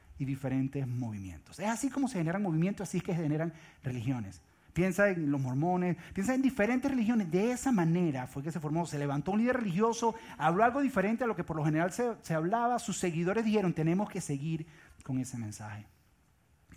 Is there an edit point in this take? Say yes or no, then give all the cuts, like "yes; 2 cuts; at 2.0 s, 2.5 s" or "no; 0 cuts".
no; 0 cuts